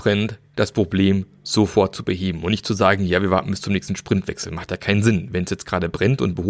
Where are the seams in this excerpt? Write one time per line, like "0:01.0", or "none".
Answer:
none